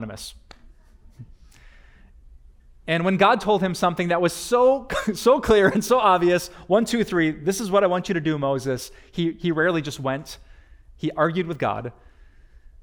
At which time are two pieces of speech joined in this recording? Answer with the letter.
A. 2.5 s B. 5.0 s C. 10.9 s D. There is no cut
D